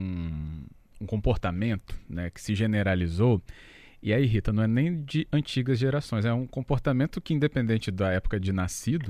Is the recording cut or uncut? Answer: uncut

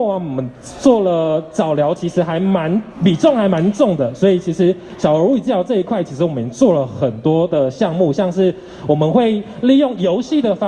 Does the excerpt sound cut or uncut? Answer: uncut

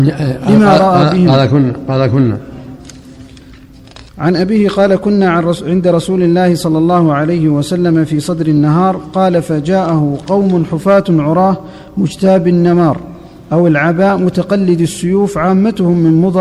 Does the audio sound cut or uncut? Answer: cut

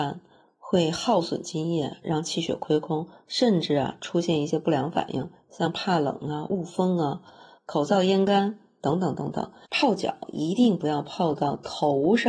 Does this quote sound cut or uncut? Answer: uncut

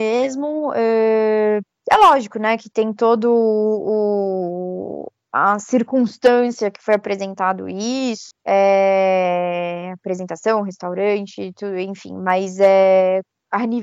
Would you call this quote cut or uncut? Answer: cut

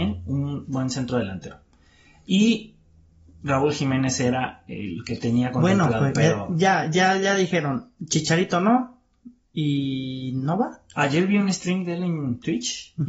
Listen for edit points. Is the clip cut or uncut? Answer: uncut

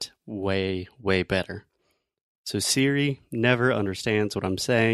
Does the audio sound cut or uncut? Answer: uncut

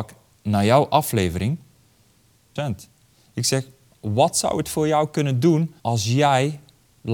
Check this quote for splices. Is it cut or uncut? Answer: cut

